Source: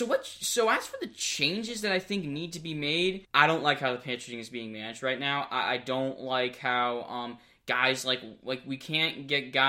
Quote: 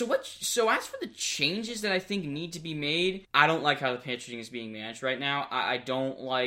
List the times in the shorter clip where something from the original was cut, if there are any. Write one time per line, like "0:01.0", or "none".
none